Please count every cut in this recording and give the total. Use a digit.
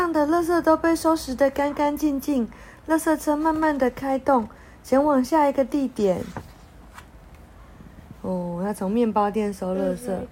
1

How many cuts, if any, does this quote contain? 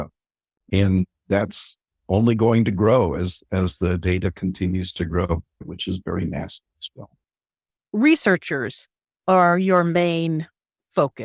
1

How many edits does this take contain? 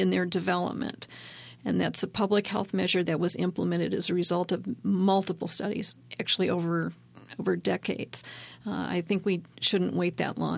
0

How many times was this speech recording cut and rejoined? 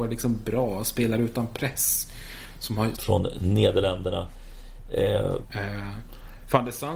2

